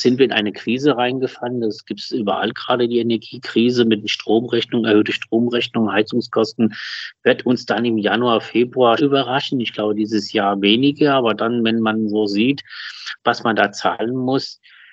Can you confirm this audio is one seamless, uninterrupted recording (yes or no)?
no